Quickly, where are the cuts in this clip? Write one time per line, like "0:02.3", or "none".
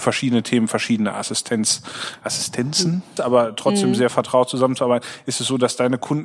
0:03.2

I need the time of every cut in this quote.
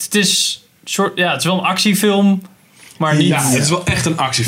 none

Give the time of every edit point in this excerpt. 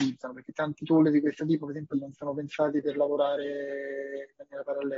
0:01.9

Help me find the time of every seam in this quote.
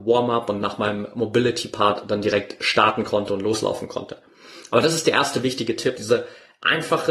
0:06.0

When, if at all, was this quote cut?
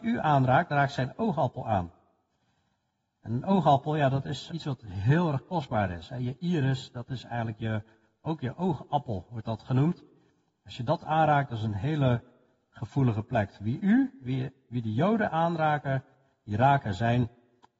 0:04.5

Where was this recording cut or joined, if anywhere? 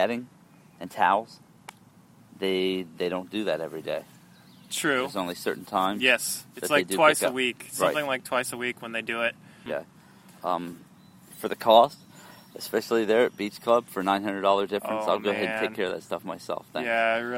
0:09.7

